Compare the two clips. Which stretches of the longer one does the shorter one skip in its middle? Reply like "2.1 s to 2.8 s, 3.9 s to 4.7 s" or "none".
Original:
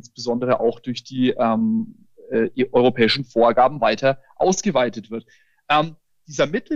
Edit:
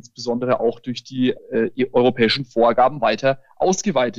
1.4 s to 2.1 s